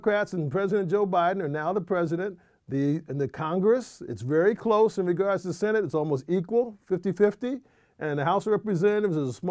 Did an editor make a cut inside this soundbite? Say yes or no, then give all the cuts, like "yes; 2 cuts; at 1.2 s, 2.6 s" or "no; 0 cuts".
no; 0 cuts